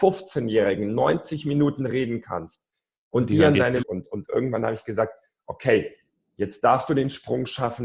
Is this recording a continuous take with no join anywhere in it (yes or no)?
no